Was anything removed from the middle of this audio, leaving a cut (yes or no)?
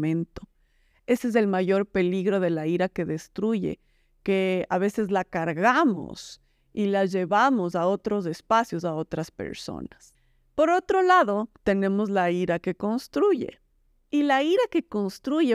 yes